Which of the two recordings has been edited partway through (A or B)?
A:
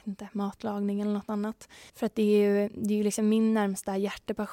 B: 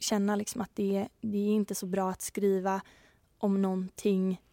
A